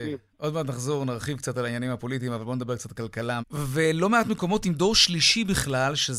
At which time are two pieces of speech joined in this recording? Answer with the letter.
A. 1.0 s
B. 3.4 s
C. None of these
B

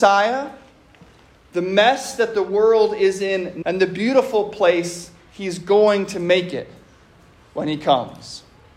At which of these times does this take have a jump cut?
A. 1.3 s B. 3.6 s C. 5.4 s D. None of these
B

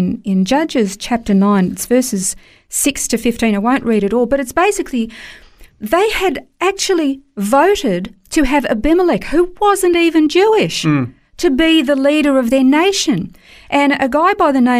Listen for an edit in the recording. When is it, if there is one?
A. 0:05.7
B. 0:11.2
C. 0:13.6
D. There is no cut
A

